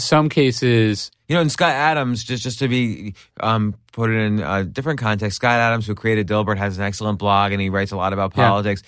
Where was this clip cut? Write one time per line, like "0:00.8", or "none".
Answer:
none